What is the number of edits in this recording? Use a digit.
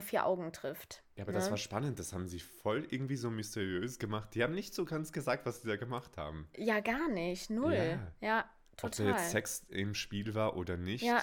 0